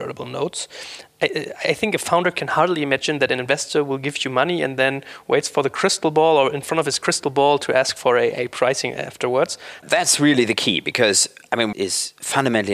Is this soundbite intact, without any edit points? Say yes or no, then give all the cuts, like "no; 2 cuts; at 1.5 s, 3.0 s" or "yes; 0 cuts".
no; 2 cuts; at 9.8 s, 11.7 s